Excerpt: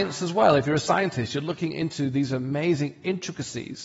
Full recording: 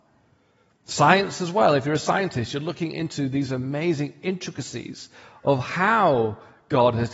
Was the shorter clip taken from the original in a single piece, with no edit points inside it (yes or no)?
yes